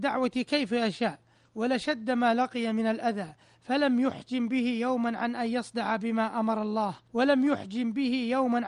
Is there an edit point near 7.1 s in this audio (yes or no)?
yes